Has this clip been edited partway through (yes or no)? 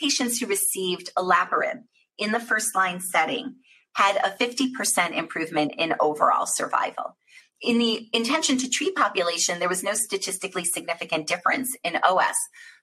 no